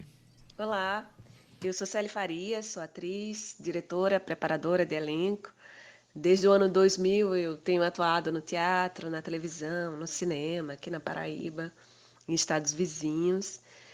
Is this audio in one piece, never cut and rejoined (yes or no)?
yes